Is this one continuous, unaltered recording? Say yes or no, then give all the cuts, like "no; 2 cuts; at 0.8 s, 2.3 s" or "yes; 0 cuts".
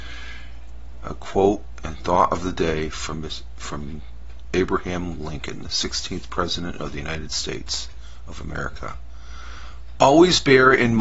no; 1 cut; at 1.0 s